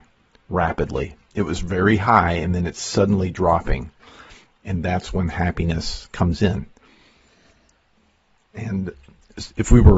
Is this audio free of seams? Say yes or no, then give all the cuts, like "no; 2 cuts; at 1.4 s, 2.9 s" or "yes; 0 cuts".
yes; 0 cuts